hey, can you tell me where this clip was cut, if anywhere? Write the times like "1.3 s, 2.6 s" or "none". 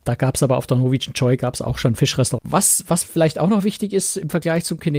2.4 s